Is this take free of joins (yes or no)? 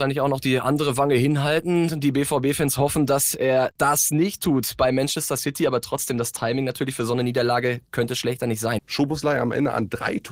no